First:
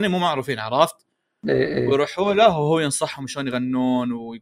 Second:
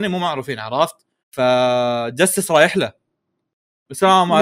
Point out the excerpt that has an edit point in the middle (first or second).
second